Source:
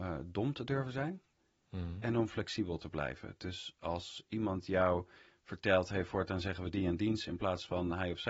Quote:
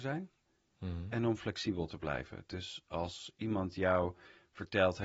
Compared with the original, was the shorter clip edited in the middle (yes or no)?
no